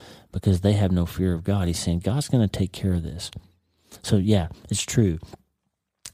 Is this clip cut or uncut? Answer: uncut